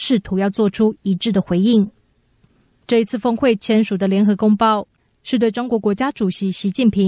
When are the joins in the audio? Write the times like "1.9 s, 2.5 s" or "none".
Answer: none